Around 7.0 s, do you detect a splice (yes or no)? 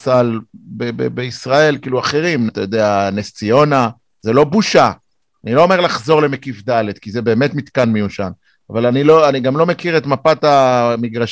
no